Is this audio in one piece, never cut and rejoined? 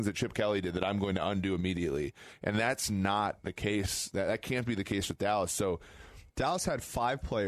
no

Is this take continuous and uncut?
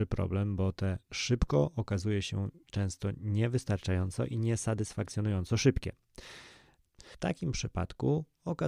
no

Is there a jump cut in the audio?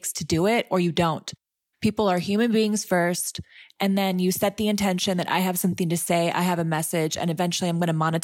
no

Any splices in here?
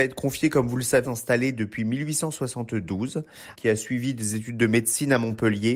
yes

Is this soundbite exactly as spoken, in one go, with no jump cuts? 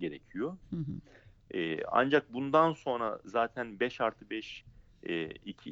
yes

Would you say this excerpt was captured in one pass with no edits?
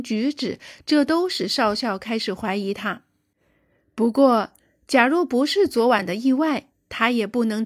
yes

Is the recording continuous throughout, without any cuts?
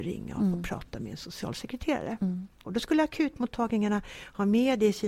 no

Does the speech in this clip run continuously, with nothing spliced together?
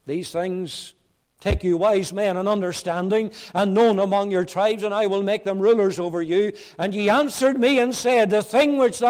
no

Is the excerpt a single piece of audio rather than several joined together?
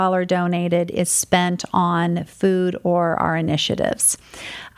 yes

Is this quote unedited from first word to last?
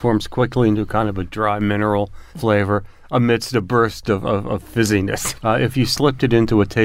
no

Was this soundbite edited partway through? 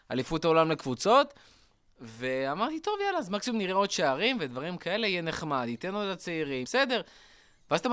yes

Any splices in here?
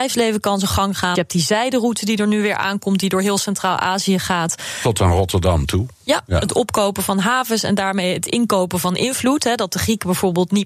yes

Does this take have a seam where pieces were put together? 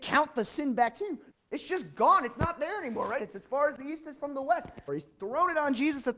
yes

